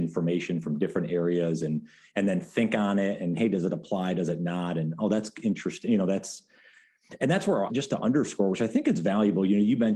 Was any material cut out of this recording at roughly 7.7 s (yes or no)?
yes